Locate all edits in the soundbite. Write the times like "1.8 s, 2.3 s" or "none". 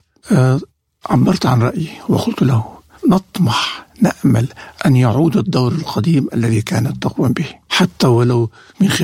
4.8 s